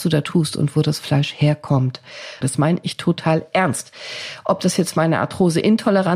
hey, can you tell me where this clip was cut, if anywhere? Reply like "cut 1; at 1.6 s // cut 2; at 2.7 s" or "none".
cut 1; at 2.4 s